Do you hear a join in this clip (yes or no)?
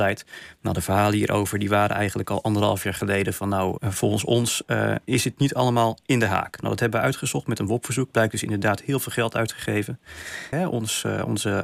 yes